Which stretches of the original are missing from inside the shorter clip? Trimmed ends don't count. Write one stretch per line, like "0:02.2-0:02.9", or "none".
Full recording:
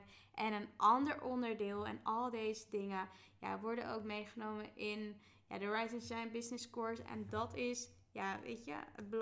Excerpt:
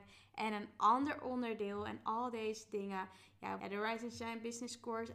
0:03.6-0:05.5